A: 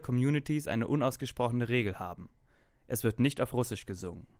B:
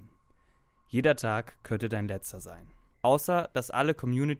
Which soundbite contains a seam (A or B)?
B